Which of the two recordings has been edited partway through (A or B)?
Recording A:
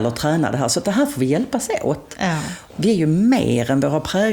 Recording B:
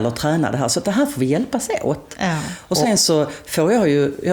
A